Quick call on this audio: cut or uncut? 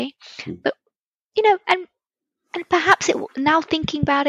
uncut